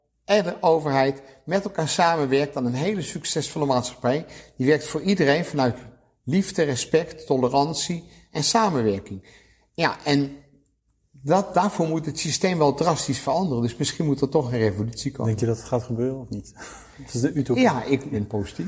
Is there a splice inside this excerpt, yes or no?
no